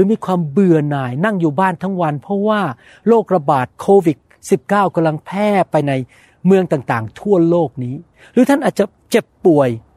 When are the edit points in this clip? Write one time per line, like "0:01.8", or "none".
0:03.7

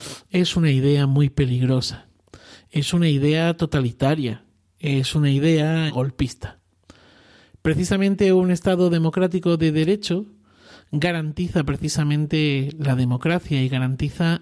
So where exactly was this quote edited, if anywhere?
0:05.9

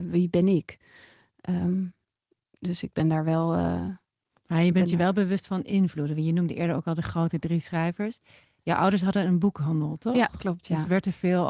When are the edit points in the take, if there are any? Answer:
none

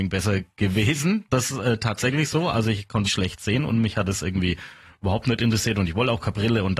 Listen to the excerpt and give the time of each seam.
0:03.0

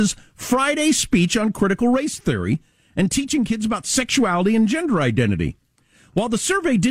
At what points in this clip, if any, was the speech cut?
none

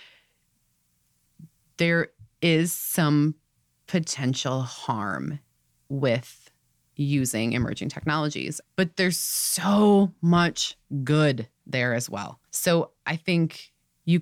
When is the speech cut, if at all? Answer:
0:08.6
0:12.5

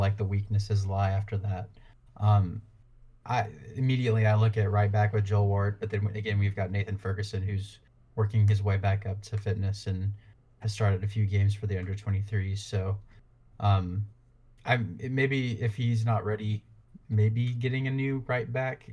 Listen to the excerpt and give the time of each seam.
none

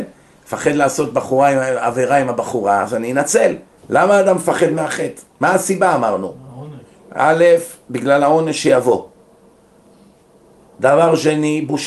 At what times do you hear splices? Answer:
0:03.8
0:05.3

